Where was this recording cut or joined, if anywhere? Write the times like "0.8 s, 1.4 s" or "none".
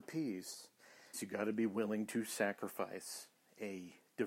1.1 s